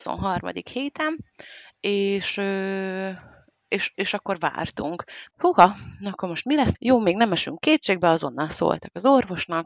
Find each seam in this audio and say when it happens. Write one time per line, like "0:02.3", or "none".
0:05.3
0:06.7